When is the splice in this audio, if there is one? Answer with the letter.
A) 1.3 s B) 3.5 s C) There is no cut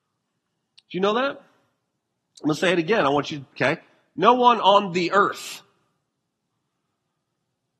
B